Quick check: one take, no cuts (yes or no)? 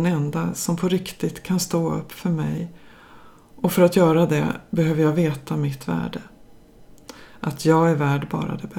yes